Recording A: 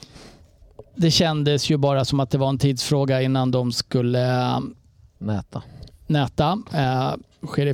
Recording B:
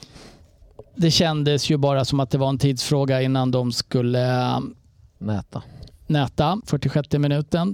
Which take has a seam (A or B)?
B